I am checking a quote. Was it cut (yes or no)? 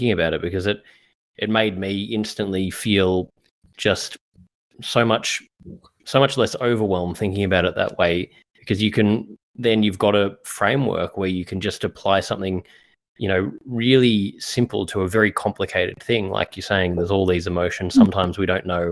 no